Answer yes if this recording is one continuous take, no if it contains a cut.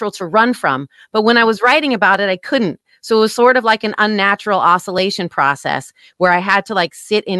yes